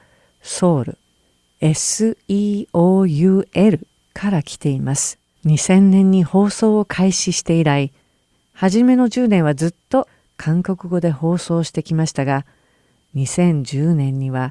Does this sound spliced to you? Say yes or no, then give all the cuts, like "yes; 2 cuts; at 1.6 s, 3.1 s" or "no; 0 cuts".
yes; 1 cut; at 5.4 s